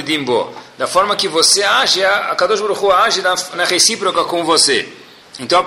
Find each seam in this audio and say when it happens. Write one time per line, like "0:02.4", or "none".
none